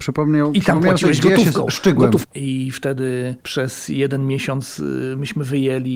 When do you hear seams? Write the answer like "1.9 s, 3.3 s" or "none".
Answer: 2.2 s, 3.4 s